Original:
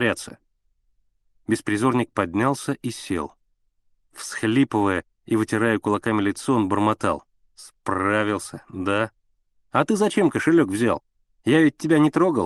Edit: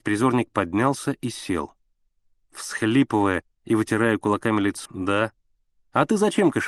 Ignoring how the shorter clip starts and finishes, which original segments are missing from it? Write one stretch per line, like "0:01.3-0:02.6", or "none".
0:06.5-0:08.6